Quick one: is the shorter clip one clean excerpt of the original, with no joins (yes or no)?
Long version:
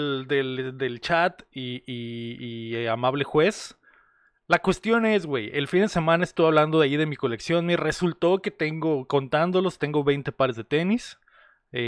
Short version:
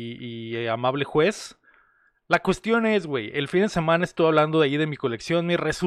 yes